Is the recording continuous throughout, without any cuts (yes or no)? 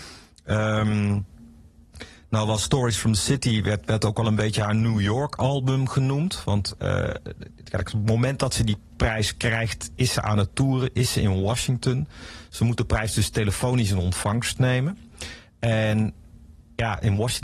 no